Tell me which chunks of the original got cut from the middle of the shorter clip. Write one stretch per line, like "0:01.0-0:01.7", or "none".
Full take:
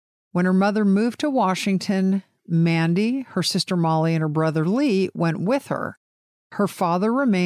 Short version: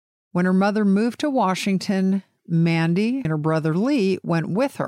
0:03.2-0:04.2